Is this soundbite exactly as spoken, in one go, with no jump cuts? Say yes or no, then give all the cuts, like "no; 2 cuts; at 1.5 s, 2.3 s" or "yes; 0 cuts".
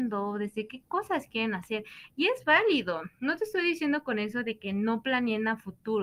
yes; 0 cuts